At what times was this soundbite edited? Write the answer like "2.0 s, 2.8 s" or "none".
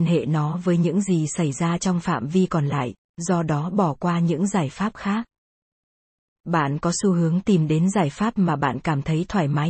none